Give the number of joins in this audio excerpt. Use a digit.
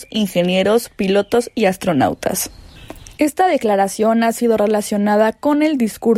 1